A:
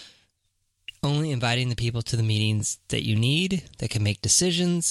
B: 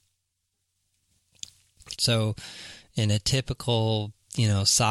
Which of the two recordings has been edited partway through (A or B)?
B